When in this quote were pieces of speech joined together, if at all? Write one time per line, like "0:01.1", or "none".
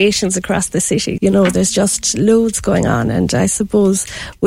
0:01.2